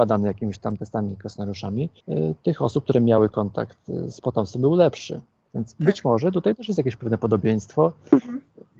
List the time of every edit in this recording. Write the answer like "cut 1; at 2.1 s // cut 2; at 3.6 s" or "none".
cut 1; at 2.0 s

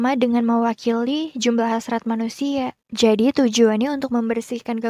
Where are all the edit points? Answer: cut 1; at 2.8 s

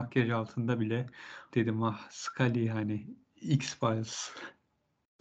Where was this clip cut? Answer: cut 1; at 1.5 s

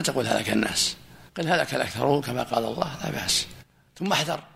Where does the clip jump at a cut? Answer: cut 1; at 1.3 s

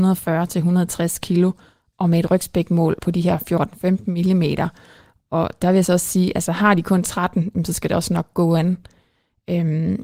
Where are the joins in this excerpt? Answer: cut 1; at 3.0 s

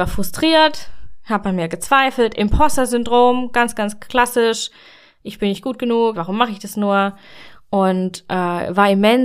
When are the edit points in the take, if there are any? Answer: cut 1; at 6.1 s

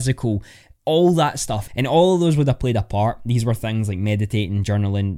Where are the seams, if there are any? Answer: cut 1; at 1.7 s

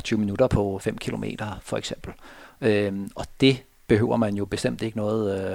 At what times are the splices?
none

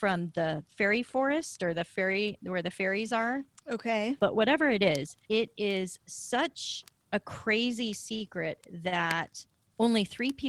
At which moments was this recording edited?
cut 1; at 4.2 s // cut 2; at 5.2 s

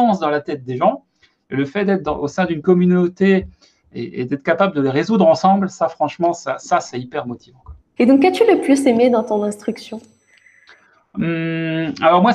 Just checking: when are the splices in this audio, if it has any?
cut 1; at 8.0 s

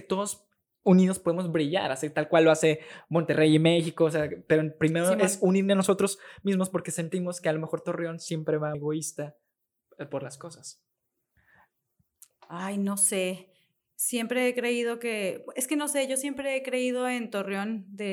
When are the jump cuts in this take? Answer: cut 1; at 8.7 s

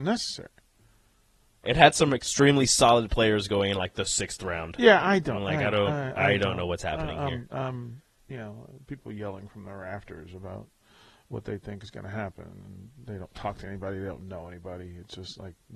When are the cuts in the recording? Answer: cut 1; at 1.6 s

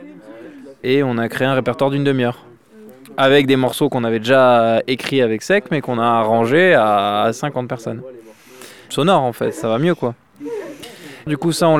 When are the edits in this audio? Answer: cut 1; at 8.9 s

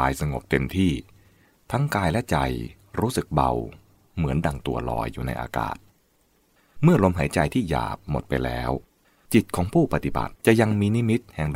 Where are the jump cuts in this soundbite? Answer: cut 1; at 10.4 s

